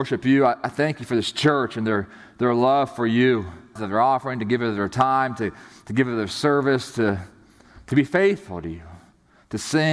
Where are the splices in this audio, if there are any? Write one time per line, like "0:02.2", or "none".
0:03.8